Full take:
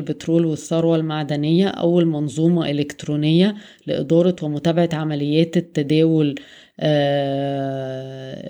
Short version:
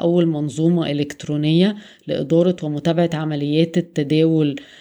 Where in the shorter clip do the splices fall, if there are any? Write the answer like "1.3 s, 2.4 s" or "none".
none

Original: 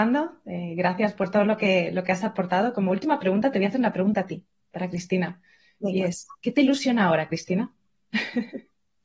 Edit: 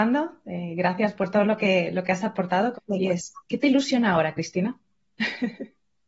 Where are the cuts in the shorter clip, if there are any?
2.7 s

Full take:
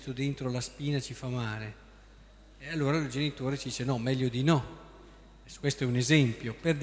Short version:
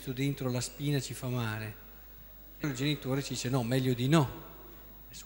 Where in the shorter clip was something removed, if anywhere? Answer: 2.6 s

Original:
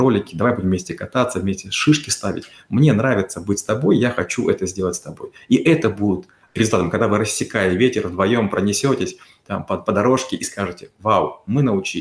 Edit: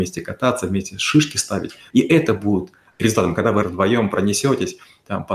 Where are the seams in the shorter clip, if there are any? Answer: 1.9 s, 3.6 s

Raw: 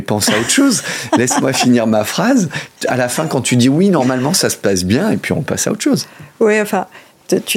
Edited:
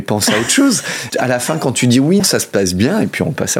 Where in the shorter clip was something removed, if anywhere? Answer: 1.1 s, 2.2 s

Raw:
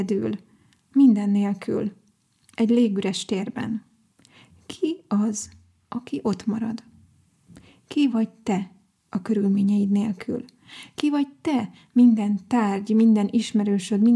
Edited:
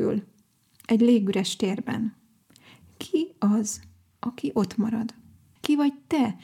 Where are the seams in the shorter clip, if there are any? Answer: 5.6 s

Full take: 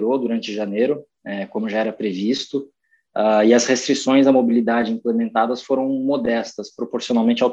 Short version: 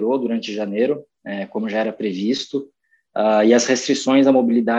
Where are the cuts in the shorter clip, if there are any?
none

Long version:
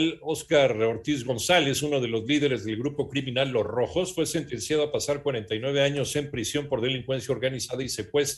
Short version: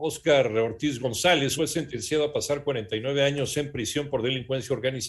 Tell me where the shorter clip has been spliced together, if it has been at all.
1.6 s

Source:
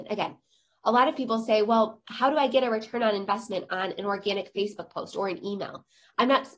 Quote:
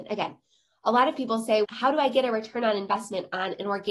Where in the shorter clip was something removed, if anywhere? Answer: 1.6 s

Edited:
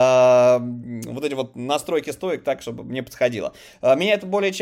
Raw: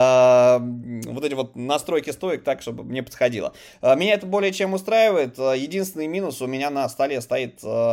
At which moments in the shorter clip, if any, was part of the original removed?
none

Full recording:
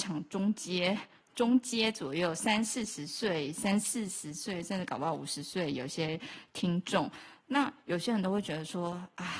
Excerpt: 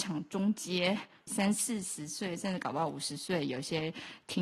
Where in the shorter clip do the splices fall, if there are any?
1.3 s

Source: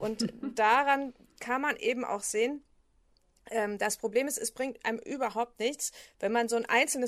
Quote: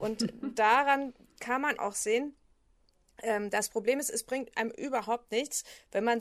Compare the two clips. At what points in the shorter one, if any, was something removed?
1.8 s

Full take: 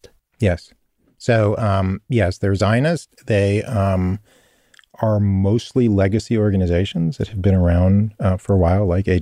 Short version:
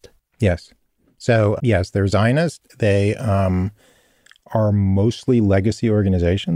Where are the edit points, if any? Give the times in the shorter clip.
1.6 s

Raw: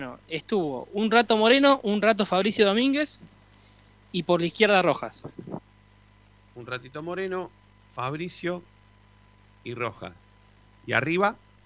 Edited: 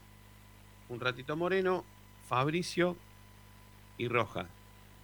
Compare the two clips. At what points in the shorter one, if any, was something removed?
none

